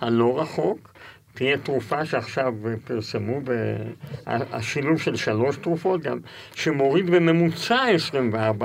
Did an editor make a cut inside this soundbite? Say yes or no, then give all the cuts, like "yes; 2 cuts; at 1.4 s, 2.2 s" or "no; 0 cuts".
no; 0 cuts